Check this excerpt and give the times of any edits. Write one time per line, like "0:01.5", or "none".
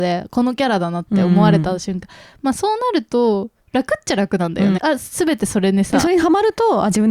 0:04.8